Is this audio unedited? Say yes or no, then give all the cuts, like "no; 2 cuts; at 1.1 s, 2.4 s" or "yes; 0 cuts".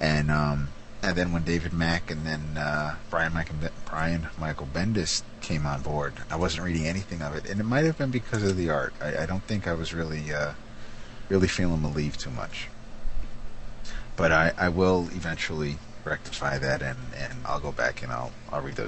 no; 2 cuts; at 6.2 s, 17.4 s